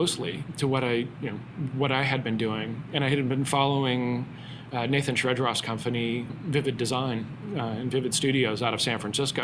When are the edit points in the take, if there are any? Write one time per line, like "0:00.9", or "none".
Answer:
0:06.3

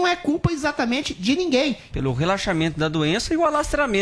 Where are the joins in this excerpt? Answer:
0:01.9

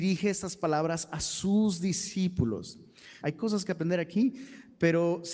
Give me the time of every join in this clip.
0:03.2

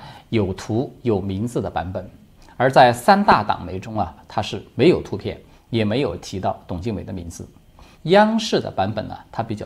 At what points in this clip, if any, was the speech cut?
0:04.2
0:08.0

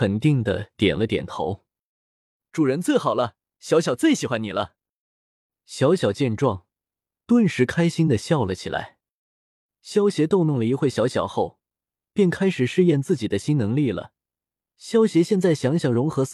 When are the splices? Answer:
none

